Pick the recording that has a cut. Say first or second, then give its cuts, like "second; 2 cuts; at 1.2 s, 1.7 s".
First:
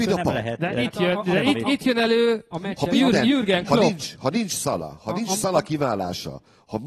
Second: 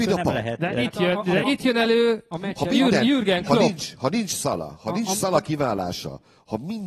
second; 1 cut; at 1.4 s